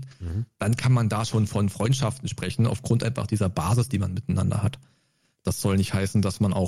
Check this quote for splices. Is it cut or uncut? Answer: uncut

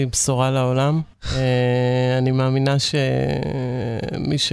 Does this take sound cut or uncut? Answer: cut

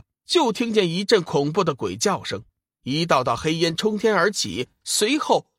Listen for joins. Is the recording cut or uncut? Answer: uncut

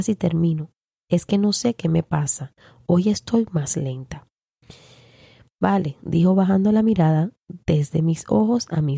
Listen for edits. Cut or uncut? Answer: uncut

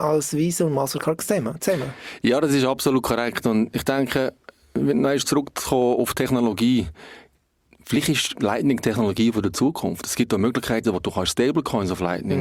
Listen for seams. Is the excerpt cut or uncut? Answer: uncut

